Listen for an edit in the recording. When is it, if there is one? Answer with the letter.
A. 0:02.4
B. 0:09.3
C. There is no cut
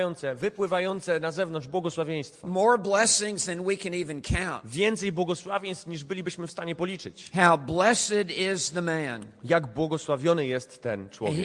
C